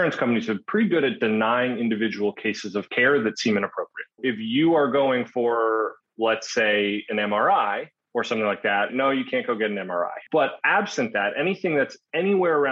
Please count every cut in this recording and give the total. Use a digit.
2